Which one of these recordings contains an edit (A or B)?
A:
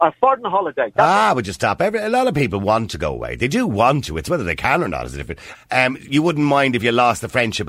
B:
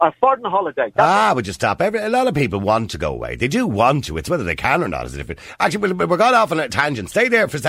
A